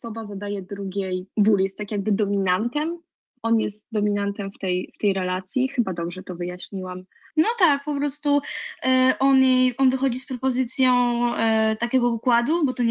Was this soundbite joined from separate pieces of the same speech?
no; 0 cuts

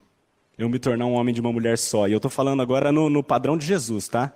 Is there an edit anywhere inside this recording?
no; 0 cuts

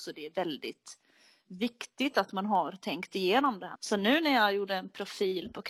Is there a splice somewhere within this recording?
yes; 1 cut; at 3.8 s

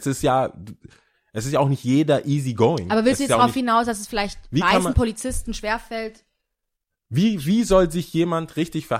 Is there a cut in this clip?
no; 0 cuts

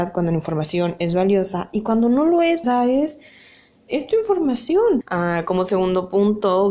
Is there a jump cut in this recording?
yes; 2 cuts; at 2.6 s, 5.0 s

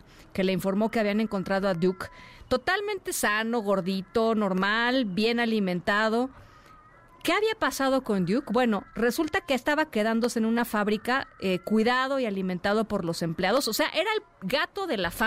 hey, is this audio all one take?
yes; 0 cuts

